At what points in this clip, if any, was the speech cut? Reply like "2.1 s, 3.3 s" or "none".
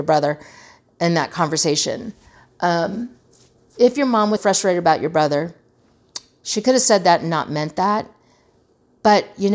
4.4 s